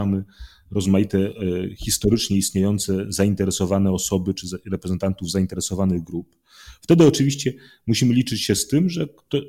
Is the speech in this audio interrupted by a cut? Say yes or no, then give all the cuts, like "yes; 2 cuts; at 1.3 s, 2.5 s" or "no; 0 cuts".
no; 0 cuts